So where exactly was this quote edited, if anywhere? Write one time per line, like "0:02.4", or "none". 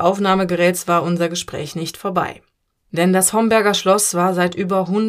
0:02.8